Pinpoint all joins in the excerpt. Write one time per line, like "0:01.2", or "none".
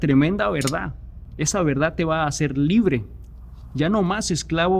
none